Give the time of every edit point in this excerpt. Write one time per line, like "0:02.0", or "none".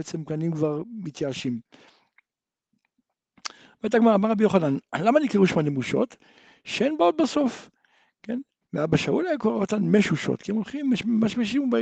0:08.6